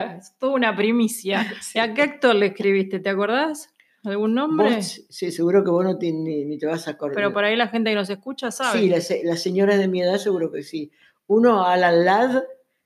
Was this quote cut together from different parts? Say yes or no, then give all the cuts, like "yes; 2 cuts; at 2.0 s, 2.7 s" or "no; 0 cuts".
no; 0 cuts